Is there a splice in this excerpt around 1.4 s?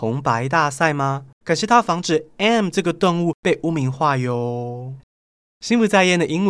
yes; 1 cut; at 1.4 s

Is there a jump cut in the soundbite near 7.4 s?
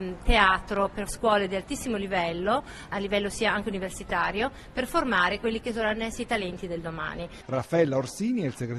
yes; 1 cut; at 7.4 s

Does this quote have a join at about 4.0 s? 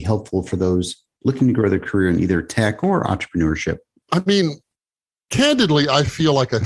yes; 1 cut; at 4.0 s

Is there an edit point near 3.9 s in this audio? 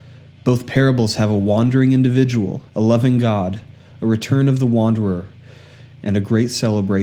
no; 1 cut; at 2.7 s

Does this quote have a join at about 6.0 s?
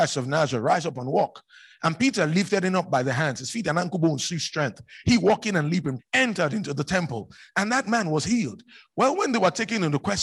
yes; 1 cut; at 6.0 s

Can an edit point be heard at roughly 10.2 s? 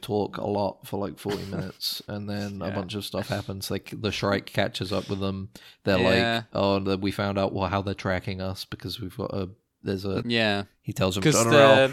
yes; 1 cut; at 10.2 s

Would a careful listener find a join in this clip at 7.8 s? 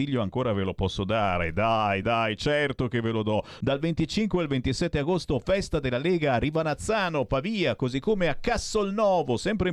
no; 2 cuts; at 2.0 s, 3.6 s

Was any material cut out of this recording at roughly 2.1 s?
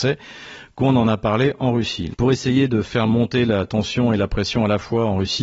yes; 1 cut; at 2.1 s

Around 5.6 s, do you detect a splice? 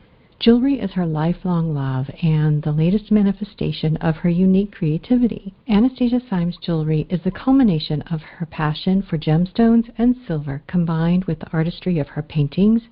yes; 1 cut; at 5.6 s

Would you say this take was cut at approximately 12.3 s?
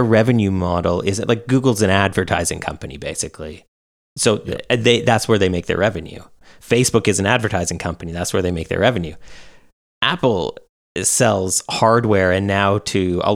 no; 0 cuts

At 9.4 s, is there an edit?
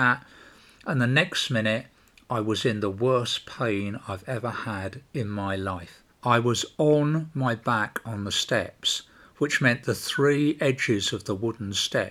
no; 1 cut; at 6.1 s

